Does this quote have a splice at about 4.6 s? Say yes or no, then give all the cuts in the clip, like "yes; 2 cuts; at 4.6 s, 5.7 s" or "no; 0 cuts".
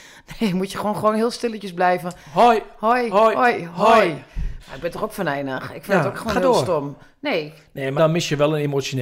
yes; 2 cuts; at 4.6 s, 8.0 s